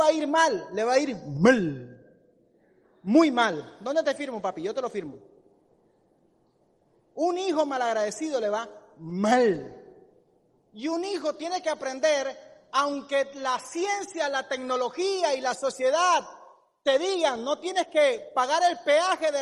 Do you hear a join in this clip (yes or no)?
no